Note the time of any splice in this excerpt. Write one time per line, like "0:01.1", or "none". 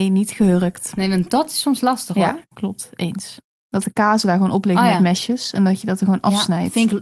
0:03.6